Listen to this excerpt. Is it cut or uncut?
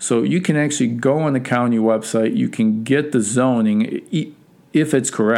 uncut